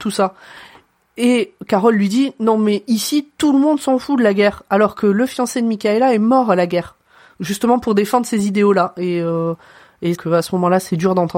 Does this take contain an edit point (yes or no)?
yes